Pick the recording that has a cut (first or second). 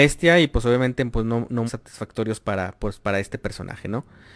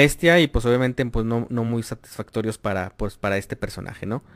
first